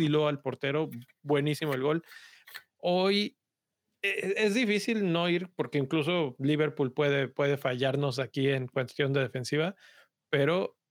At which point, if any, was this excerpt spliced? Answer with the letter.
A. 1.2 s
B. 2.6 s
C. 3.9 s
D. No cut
B